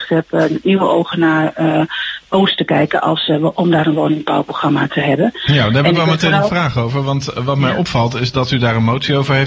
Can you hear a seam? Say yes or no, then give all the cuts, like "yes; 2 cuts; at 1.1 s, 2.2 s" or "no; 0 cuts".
no; 0 cuts